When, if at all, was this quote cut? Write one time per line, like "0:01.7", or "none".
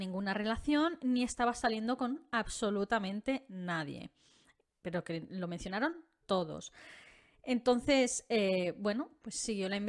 none